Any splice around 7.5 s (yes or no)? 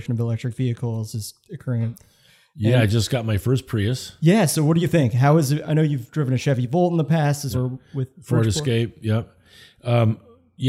yes